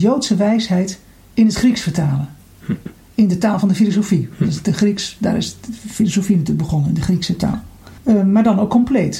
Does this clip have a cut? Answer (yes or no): yes